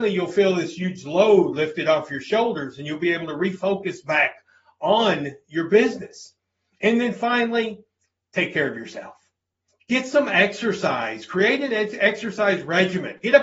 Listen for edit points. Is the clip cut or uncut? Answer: uncut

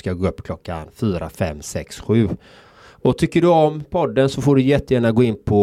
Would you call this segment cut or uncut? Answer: cut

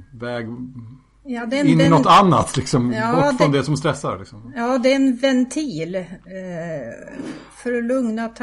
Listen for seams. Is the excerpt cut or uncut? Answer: uncut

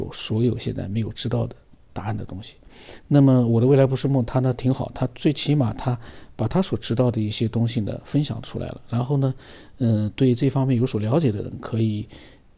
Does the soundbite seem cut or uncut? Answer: uncut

